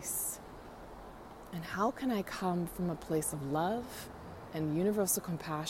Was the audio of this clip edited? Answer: no; 0 cuts

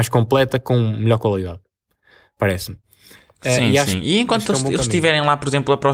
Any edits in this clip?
no; 0 cuts

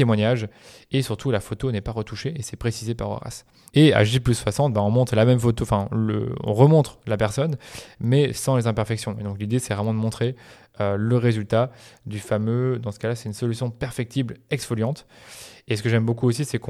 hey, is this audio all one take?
no; 1 cut; at 3.7 s

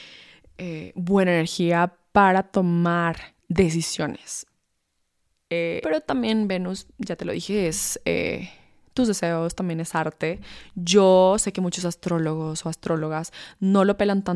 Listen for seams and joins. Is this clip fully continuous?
no; 1 cut; at 5.8 s

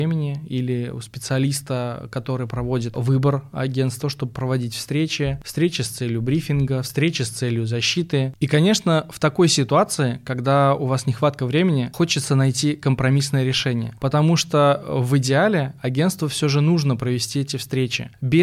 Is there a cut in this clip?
yes; 2 cuts; at 4.0 s, 14.0 s

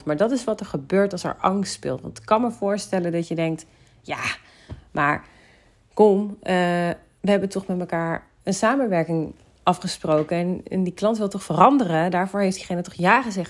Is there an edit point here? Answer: no; 0 cuts

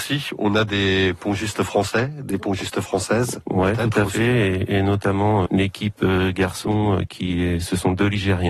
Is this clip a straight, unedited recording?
no; 1 cut; at 5.5 s

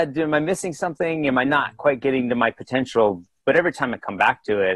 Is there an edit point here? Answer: no; 0 cuts

